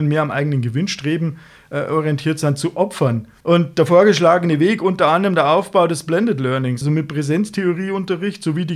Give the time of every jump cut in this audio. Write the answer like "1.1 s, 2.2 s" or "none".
3.4 s, 6.8 s